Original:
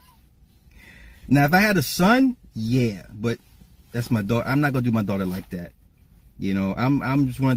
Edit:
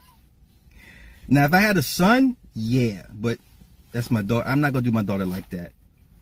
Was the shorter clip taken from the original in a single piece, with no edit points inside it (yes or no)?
yes